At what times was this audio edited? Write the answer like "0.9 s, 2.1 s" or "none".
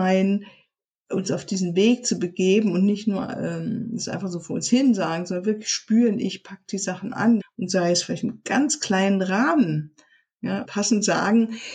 7.4 s, 10.6 s

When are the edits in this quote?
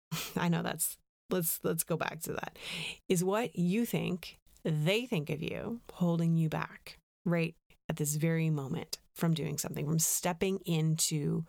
none

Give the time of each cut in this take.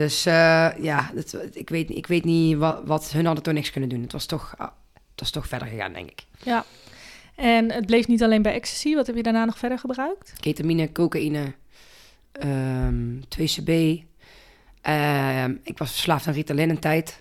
none

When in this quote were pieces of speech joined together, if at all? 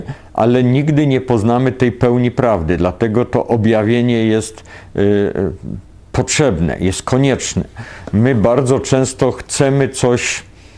none

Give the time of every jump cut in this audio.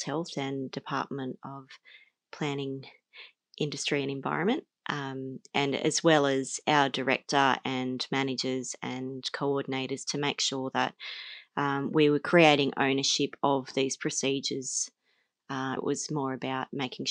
15.8 s

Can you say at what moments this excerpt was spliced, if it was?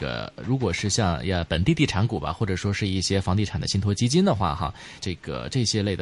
5.0 s

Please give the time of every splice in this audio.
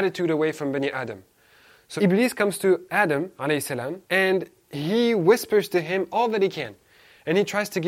2.0 s, 4.0 s

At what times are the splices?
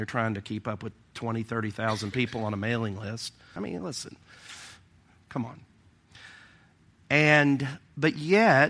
3.6 s

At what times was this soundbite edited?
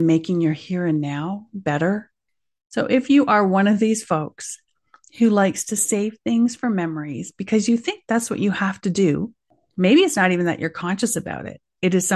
none

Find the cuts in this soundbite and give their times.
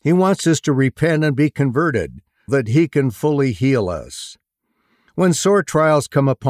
2.5 s

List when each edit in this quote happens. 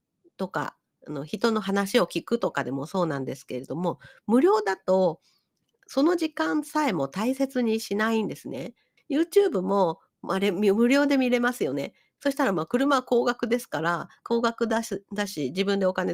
9.0 s, 12.2 s

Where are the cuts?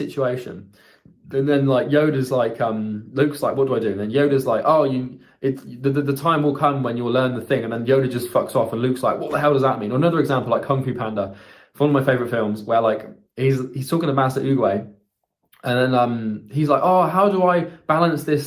none

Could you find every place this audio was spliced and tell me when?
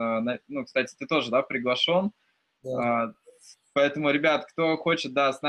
none

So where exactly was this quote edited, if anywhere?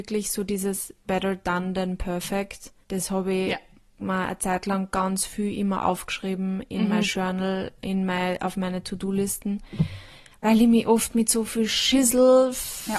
2.8 s

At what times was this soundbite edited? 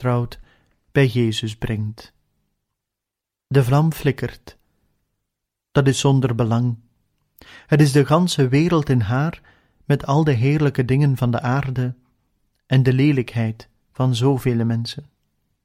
none

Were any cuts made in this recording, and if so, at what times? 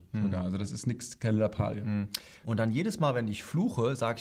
2.4 s

